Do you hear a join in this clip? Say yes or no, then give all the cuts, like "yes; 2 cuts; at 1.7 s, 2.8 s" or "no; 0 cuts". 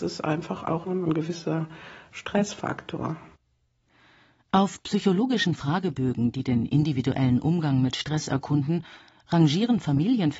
no; 0 cuts